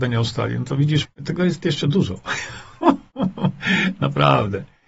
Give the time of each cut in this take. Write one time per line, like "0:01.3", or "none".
0:01.0